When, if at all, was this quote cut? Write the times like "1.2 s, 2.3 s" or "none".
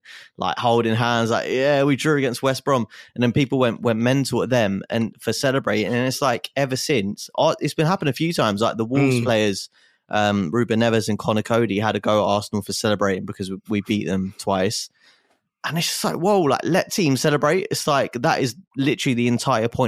none